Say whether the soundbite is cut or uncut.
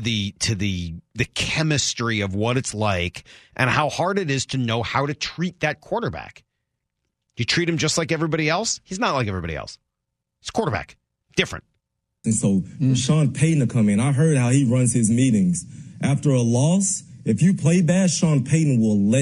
cut